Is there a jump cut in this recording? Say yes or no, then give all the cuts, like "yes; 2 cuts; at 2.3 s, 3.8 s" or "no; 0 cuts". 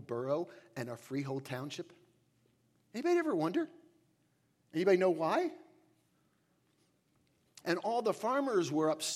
yes; 1 cut; at 7.6 s